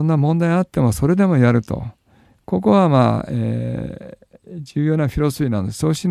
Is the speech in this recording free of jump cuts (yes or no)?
yes